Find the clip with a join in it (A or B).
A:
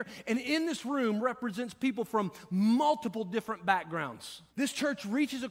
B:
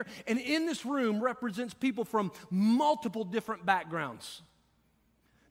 A